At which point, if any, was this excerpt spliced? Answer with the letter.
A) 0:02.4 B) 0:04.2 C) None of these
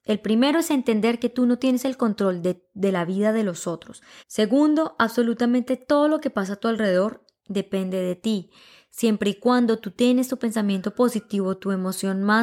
B